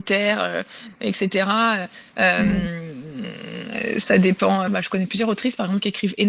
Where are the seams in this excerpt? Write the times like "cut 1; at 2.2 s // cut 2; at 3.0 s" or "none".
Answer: cut 1; at 4.7 s